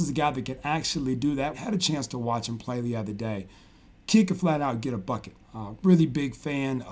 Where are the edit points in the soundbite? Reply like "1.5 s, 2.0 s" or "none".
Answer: 1.5 s